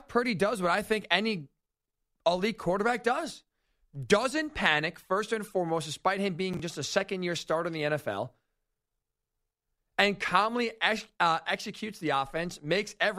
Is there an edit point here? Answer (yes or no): no